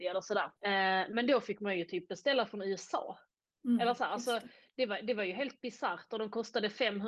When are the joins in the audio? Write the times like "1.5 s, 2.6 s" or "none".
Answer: none